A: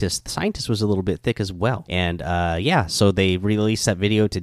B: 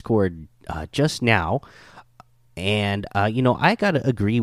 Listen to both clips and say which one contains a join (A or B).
A